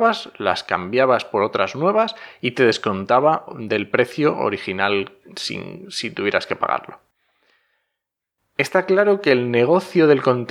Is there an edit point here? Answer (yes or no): no